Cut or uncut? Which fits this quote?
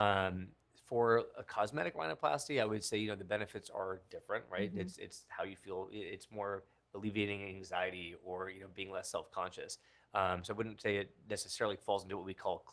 uncut